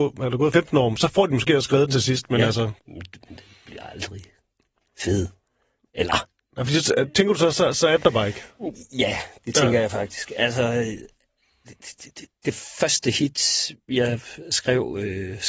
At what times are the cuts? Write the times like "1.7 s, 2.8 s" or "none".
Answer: none